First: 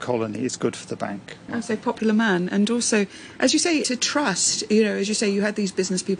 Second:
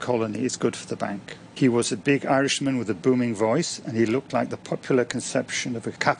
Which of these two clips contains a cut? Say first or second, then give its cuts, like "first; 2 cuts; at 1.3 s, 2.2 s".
first; 1 cut; at 1.5 s